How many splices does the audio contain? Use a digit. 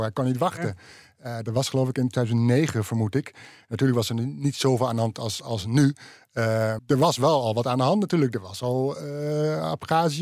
1